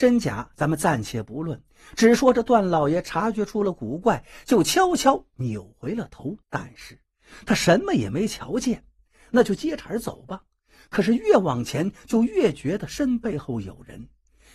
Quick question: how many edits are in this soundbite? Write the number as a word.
one